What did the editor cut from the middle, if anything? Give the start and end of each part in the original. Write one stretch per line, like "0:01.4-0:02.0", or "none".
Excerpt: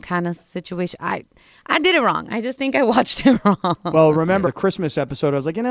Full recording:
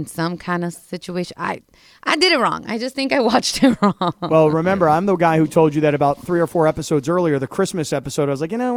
0:04.8-0:07.4